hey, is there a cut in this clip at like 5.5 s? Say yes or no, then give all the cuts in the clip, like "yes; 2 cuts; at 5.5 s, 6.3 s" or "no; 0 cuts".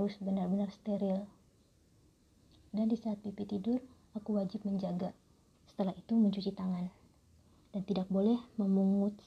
yes; 1 cut; at 5.5 s